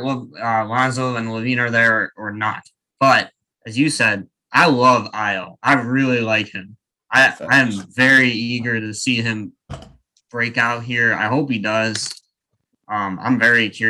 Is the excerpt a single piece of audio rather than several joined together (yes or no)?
yes